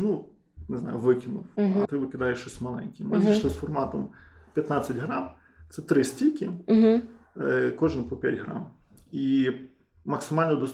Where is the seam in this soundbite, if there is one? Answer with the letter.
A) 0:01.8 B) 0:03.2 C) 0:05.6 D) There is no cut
A